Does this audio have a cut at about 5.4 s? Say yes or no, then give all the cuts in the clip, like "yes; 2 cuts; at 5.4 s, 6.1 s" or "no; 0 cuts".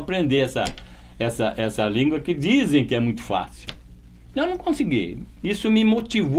yes; 1 cut; at 5.4 s